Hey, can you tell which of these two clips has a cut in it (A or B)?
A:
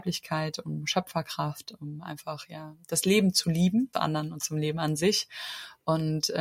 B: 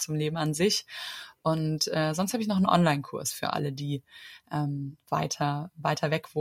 A